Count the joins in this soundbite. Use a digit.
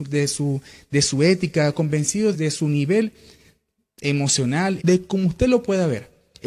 2